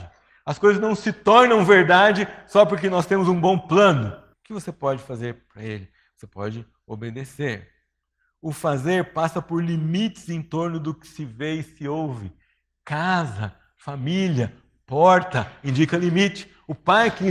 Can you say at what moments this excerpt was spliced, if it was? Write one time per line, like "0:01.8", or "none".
0:04.3